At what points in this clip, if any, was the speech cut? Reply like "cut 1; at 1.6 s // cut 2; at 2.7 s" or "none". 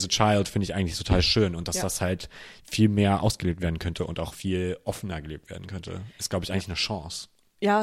none

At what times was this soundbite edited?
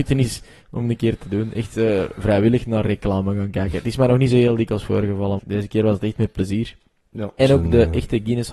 cut 1; at 5.4 s // cut 2; at 7.4 s

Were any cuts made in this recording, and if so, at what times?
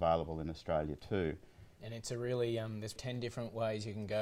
cut 1; at 1.8 s // cut 2; at 3.0 s

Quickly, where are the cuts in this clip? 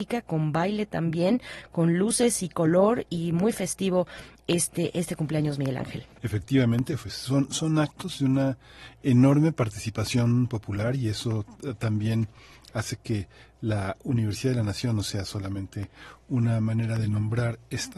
cut 1; at 6.2 s

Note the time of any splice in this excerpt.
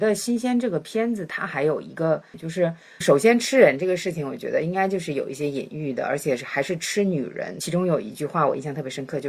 cut 1; at 2.3 s

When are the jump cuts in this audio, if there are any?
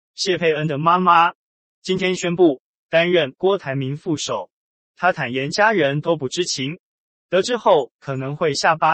none

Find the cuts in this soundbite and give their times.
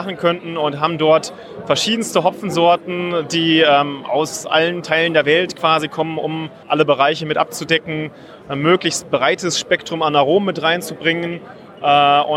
cut 1; at 6.6 s

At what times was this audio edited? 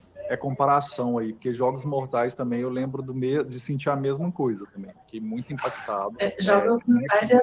cut 1; at 6.1 s

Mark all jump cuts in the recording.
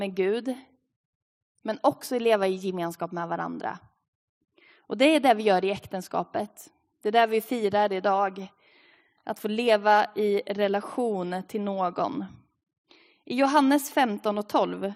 none

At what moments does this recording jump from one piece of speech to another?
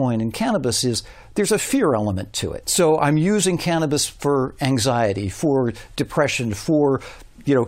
cut 1; at 2.6 s

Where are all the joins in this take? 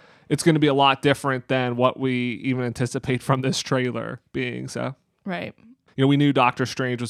cut 1; at 5.9 s

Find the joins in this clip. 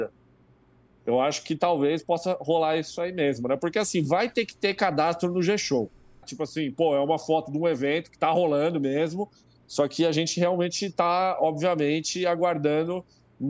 cut 1; at 6.2 s

